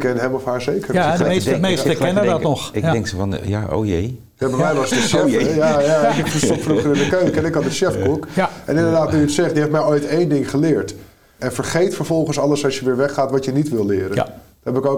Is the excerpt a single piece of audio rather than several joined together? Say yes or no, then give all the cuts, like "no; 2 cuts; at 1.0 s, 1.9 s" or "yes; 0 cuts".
no; 2 cuts; at 3.4 s, 11.4 s